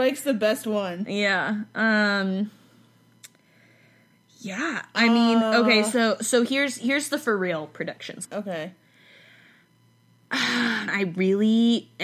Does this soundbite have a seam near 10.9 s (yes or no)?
yes